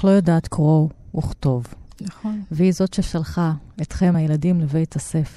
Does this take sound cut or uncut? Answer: uncut